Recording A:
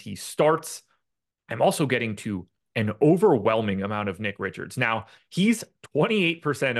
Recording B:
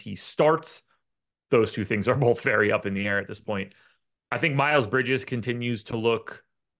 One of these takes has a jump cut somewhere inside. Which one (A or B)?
A